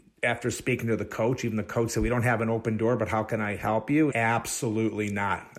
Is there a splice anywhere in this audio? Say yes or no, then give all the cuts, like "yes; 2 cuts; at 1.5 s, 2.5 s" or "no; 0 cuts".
yes; 1 cut; at 4.1 s